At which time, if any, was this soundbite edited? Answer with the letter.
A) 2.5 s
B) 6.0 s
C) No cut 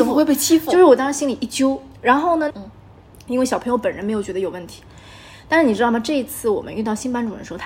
A